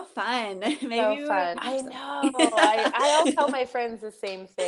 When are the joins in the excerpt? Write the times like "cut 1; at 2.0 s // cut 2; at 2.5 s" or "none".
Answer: cut 1; at 1.5 s // cut 2; at 3.2 s